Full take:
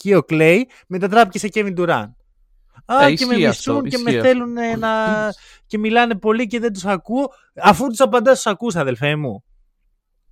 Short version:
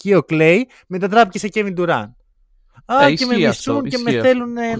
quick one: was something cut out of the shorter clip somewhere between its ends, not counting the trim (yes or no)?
no